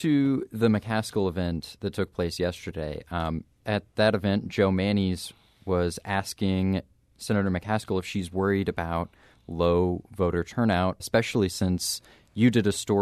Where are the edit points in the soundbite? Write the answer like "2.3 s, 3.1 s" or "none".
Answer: 3.6 s, 11.0 s